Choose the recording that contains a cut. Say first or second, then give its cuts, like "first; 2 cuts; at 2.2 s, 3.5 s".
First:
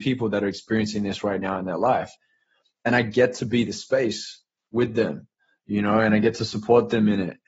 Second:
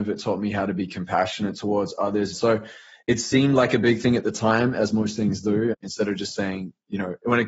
second; 2 cuts; at 2.3 s, 5.7 s